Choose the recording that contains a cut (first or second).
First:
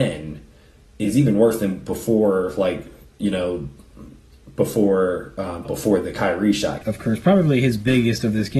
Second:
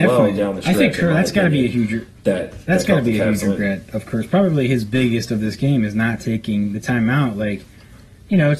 first